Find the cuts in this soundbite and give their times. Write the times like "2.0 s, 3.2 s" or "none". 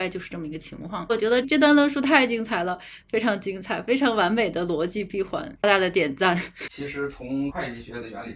5.6 s, 6.7 s